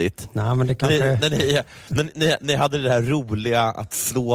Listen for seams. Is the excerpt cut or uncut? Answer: uncut